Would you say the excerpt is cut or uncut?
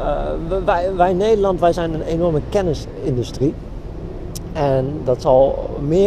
uncut